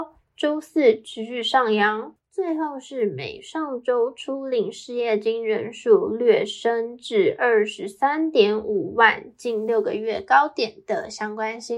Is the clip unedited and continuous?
no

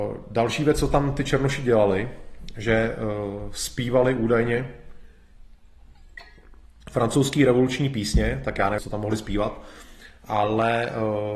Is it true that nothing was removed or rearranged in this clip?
no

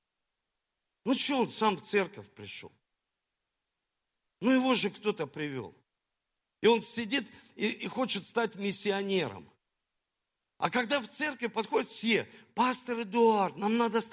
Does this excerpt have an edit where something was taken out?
no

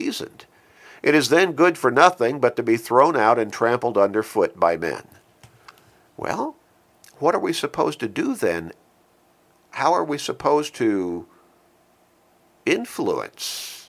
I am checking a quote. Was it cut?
no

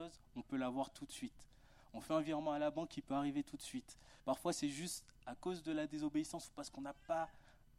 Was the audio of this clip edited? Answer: yes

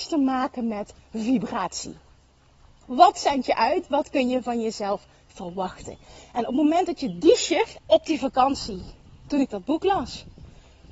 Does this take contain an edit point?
yes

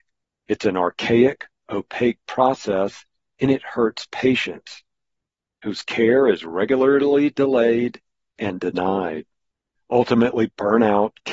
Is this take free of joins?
no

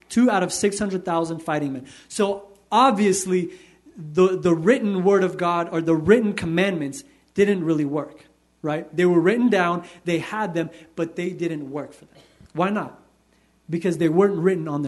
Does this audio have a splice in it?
no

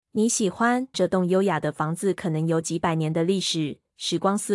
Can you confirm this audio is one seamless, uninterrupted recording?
no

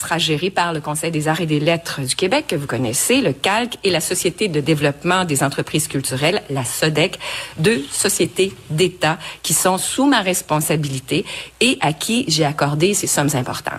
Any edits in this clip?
no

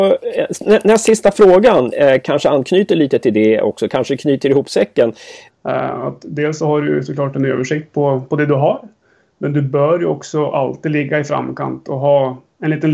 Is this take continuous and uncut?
no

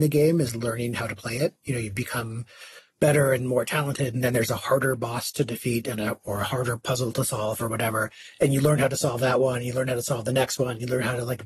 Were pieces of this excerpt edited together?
no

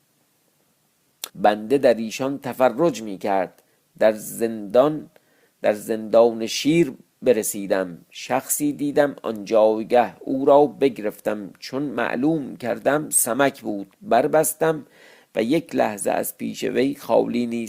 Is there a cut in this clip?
yes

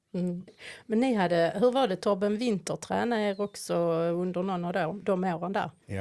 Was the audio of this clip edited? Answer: no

